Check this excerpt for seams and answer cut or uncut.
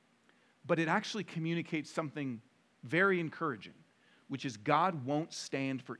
uncut